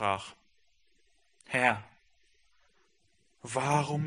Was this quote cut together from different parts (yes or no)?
no